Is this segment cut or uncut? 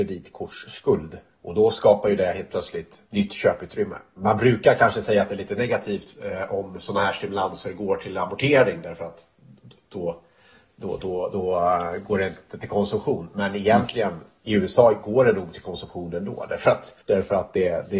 cut